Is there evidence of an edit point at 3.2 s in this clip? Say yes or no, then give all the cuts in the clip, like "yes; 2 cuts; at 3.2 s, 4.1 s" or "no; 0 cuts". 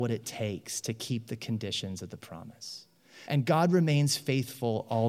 yes; 1 cut; at 3.2 s